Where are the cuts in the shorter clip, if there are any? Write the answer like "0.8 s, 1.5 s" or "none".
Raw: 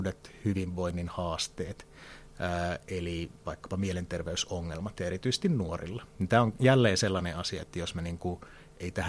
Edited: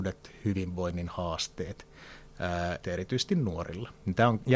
2.8 s